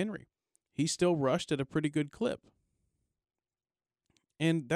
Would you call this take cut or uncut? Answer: uncut